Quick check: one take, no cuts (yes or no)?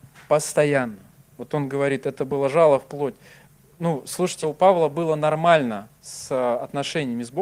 no